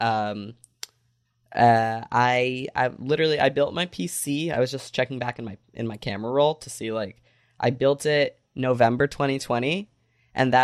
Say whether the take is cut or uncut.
uncut